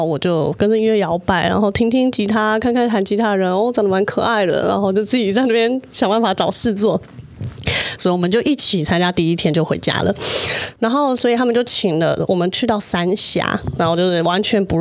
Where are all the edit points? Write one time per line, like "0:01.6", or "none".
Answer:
0:08.0
0:10.8